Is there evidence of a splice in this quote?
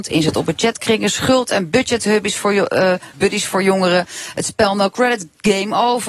yes; 1 cut; at 3.1 s

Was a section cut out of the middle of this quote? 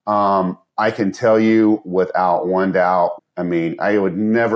yes; 1 cut; at 3.2 s

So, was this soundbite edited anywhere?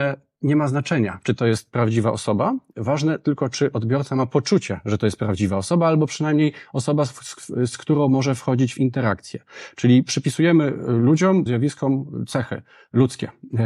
yes; 1 cut; at 11.5 s

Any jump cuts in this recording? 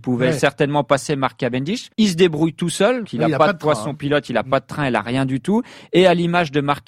yes; 2 cuts; at 1.9 s, 3.0 s

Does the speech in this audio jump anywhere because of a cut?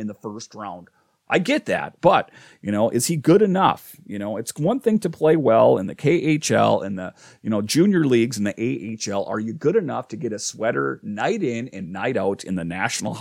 no; 0 cuts

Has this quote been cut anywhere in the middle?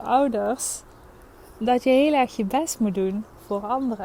no; 0 cuts

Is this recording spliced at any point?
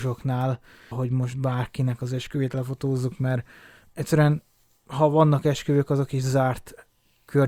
yes; 1 cut; at 0.9 s

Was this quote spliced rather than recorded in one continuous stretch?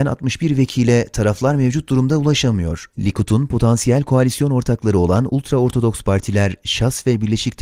yes; 1 cut; at 2.9 s

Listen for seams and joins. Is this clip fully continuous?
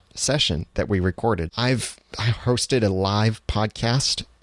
no; 1 cut; at 1.5 s

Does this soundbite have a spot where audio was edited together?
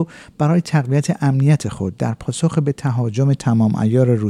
no; 0 cuts

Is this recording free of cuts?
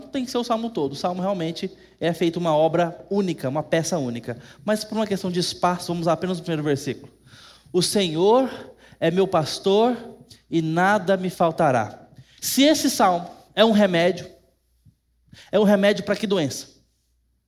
no; 1 cut; at 12.4 s

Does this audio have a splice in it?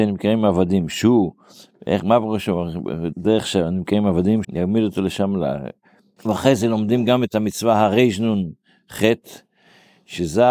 yes; 3 cuts; at 3.1 s, 4.4 s, 6.2 s

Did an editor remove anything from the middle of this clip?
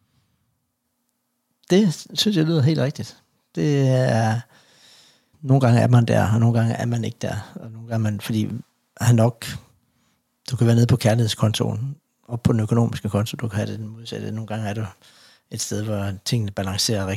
yes; 1 cut; at 5.3 s

